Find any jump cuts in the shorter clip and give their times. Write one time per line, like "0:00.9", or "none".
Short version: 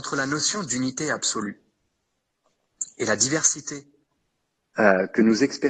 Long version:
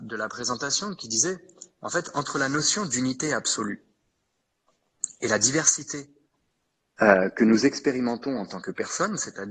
none